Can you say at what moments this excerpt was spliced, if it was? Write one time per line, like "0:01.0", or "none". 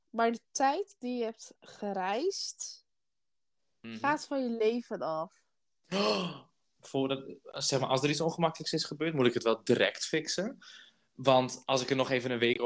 0:06.8